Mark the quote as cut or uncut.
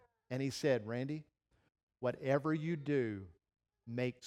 uncut